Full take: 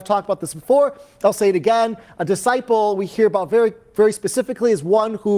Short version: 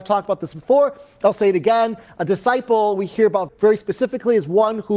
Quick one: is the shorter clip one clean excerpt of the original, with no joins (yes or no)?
no